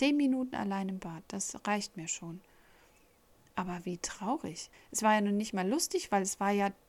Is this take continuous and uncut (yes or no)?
no